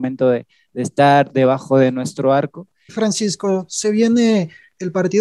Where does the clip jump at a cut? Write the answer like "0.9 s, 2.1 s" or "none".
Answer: 2.9 s